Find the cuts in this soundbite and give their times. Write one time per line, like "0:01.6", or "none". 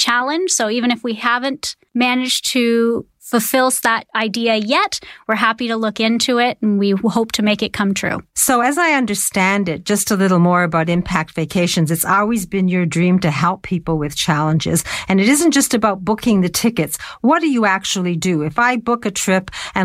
none

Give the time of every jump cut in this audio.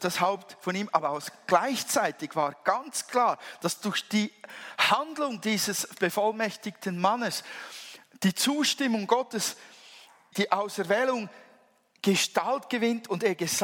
0:10.3

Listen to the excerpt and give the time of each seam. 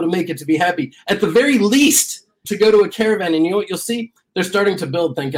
0:02.4
0:04.2

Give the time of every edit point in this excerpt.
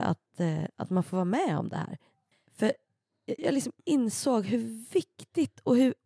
0:02.3
0:03.4

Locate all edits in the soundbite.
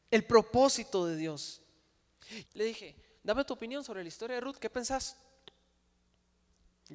0:02.4

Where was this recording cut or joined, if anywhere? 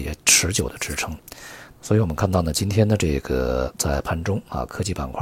0:01.7

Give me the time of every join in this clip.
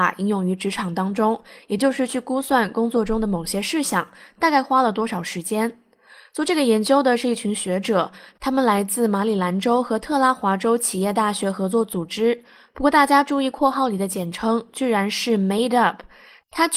none

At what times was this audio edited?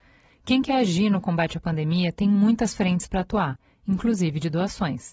none

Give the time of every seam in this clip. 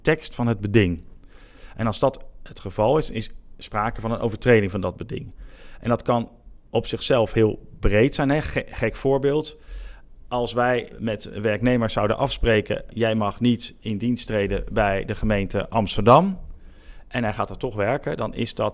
0:12.9

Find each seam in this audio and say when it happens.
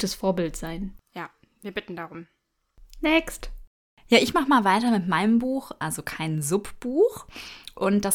0:05.8

